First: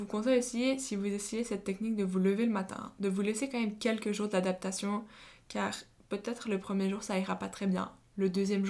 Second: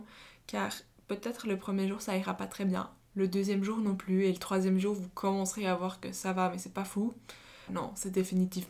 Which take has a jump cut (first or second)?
second